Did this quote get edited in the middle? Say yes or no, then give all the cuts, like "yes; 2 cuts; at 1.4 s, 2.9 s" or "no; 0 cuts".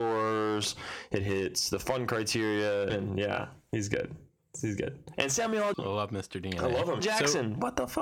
yes; 3 cuts; at 2.9 s, 5.7 s, 7.0 s